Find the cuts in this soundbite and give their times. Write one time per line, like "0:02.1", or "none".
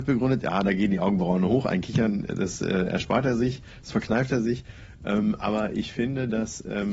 none